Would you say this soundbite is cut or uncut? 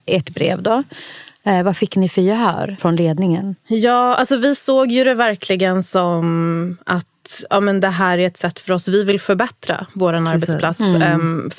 uncut